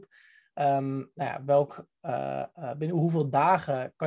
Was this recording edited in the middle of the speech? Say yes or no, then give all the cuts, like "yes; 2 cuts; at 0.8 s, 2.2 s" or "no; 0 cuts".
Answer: no; 0 cuts